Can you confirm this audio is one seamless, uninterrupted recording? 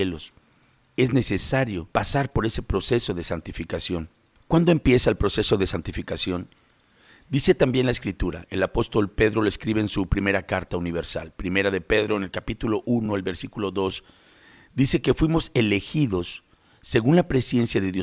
yes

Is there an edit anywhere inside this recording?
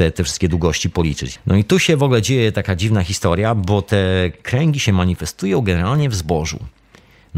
yes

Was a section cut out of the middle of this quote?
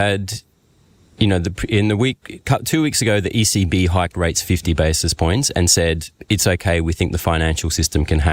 no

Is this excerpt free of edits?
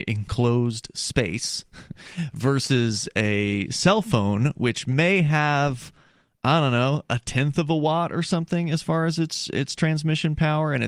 yes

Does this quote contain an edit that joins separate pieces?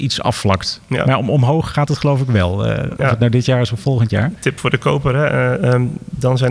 yes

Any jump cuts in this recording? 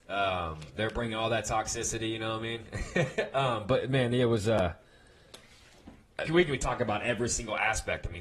yes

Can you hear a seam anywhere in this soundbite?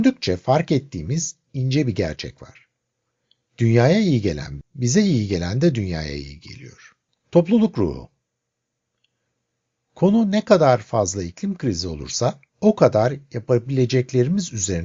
yes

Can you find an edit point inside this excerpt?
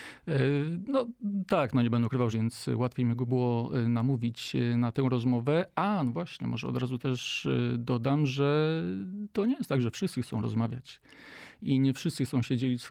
yes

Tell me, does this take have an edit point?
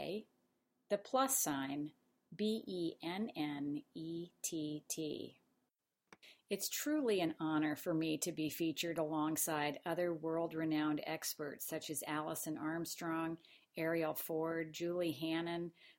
no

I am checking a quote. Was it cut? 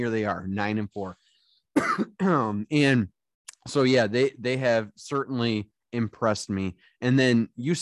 no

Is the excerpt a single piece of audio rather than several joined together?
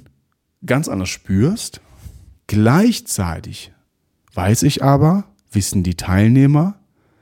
no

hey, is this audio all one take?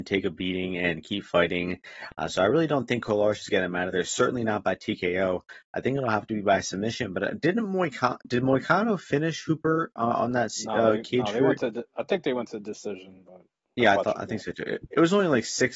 yes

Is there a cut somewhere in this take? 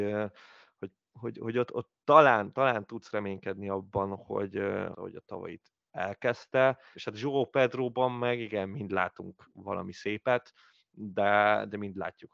yes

